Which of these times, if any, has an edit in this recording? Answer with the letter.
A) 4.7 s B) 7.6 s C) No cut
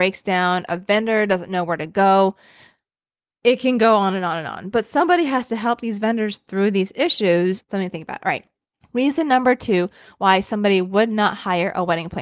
B